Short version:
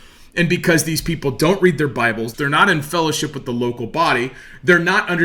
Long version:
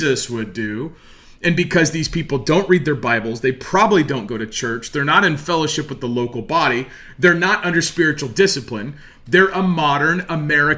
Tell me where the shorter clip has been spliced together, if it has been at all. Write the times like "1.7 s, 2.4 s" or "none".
2.3 s